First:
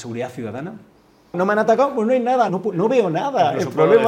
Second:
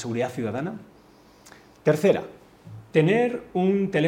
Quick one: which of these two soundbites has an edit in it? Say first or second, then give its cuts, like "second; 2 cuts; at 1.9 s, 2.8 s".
first; 2 cuts; at 1.3 s, 2.5 s